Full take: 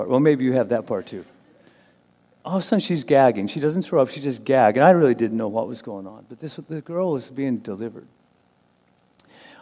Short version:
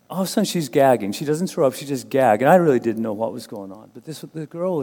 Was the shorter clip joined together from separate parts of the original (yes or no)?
no